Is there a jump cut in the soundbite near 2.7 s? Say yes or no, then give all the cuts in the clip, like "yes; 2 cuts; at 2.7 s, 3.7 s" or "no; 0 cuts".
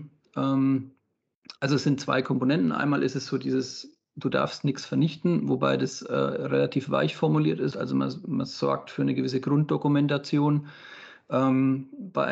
no; 1 cut; at 7.7 s